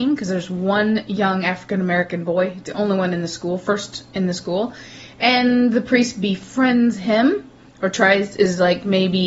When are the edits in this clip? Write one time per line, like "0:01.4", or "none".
none